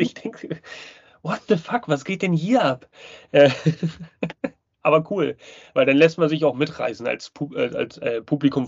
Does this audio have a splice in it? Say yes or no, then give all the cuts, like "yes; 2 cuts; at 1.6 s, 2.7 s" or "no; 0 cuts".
no; 0 cuts